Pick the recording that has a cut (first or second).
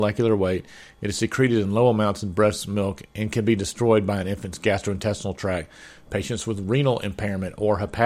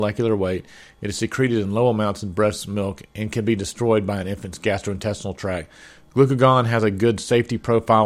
first